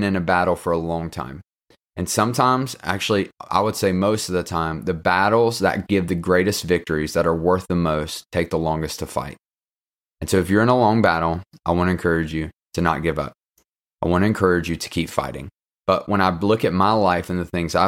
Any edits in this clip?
yes; 1 cut; at 15.7 s

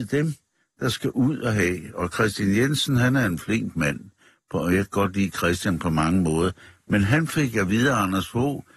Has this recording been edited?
no; 0 cuts

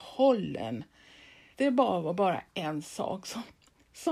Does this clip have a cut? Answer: yes; 1 cut; at 1.5 s

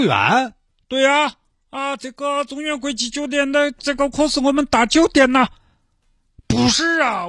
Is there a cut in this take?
no; 0 cuts

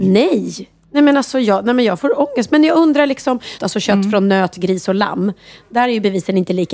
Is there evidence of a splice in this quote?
yes; 1 cut; at 3.6 s

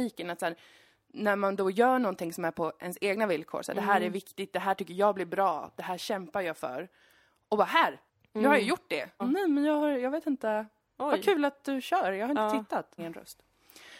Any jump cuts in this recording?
yes; 2 cuts; at 9.2 s, 13.0 s

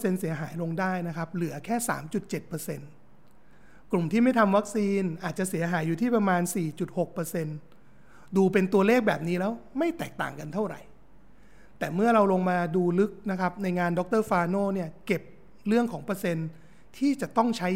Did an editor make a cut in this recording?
no; 0 cuts

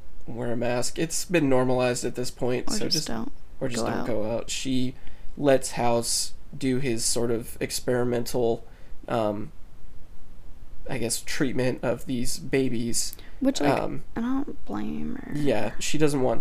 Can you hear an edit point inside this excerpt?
yes; 1 cut; at 4.5 s

